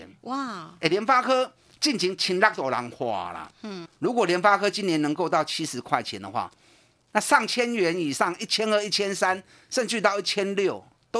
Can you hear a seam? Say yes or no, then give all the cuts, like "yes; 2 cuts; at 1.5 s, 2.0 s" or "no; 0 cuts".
yes; 1 cut; at 3.9 s